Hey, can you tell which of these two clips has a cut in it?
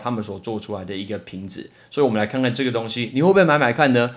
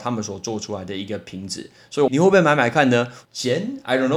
second; 2 cuts; at 2.1 s, 3.3 s

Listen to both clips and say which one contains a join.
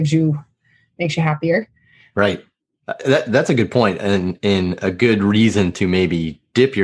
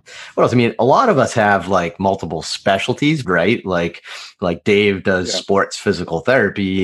second; 1 cut; at 3.2 s

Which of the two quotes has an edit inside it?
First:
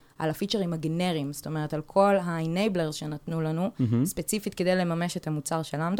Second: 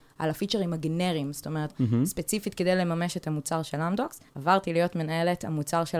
second; 2 cuts; at 1.7 s, 4.3 s

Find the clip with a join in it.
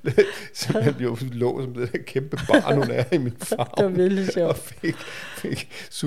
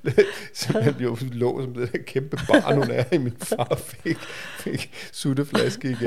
second; 1 cut; at 3.7 s

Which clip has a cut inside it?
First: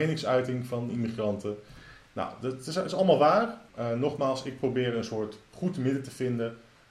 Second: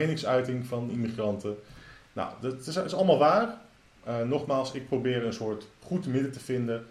first; 1 cut; at 3.7 s

